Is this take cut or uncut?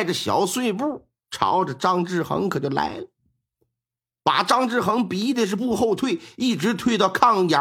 cut